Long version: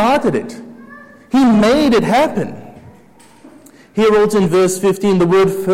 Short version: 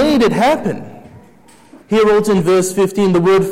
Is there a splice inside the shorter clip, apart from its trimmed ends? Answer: yes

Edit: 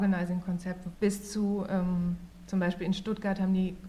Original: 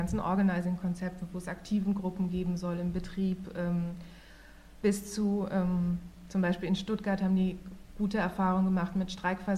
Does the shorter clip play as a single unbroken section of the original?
no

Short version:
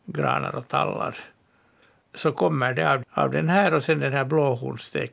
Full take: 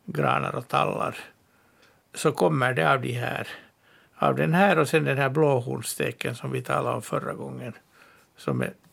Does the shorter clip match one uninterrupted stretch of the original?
no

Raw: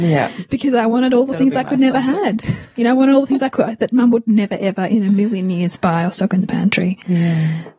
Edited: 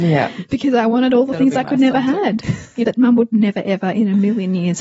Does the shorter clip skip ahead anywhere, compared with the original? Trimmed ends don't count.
yes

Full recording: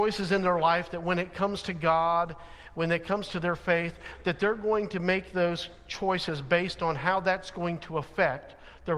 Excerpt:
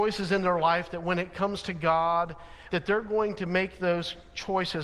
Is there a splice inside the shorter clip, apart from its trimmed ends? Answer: yes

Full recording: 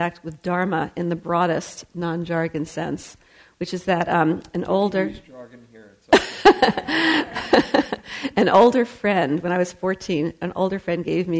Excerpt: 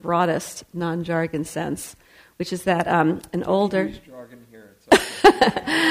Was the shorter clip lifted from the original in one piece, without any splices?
yes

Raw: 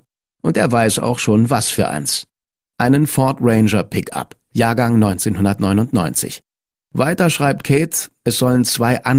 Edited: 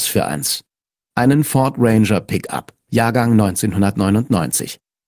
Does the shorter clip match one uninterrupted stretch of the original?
yes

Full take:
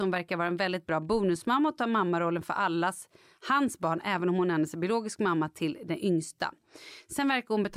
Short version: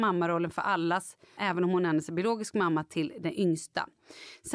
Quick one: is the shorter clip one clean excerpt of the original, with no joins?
no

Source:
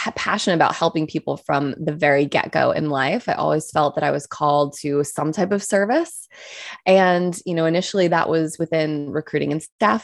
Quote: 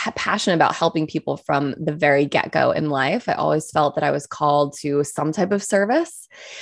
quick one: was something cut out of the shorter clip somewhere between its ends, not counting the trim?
no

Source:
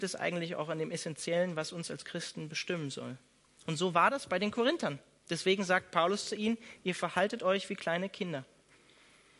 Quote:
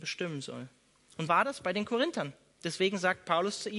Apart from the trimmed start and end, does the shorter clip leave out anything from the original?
yes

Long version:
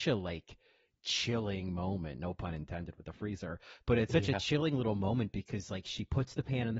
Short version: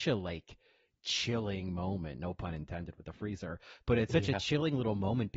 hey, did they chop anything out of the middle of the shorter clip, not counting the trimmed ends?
no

